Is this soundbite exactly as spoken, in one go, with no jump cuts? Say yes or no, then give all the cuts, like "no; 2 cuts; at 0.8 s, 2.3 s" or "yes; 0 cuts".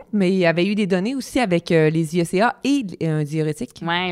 yes; 0 cuts